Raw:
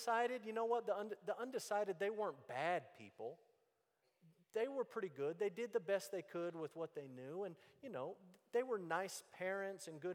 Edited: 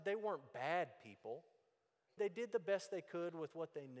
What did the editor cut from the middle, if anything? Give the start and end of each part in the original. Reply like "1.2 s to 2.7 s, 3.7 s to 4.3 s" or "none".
4.1 s to 5.4 s